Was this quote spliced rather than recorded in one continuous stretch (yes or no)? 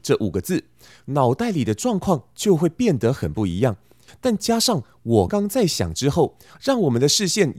yes